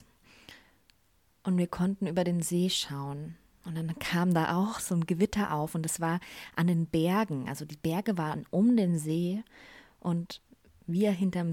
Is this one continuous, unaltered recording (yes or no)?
yes